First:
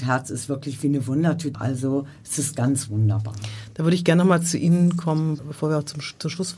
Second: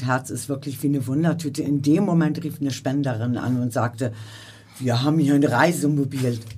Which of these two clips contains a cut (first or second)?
first